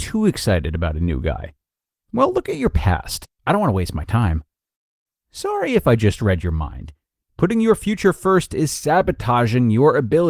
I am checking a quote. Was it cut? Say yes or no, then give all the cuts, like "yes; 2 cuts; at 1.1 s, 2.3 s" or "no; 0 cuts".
yes; 2 cuts; at 3.4 s, 7.2 s